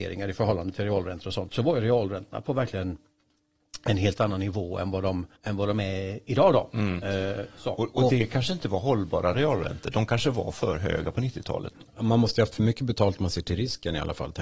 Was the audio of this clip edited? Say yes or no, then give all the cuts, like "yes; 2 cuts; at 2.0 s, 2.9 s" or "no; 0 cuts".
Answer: yes; 2 cuts; at 1.5 s, 5.4 s